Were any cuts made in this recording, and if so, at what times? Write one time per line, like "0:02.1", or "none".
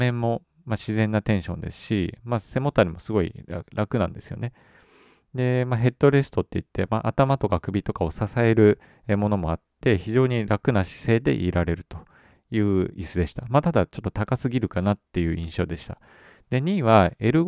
none